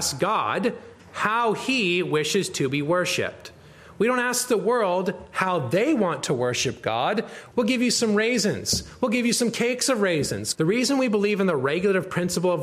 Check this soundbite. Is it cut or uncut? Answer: cut